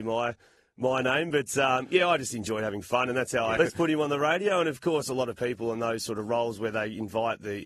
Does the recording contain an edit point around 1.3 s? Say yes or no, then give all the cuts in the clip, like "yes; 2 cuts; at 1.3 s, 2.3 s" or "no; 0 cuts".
no; 1 cut; at 3.6 s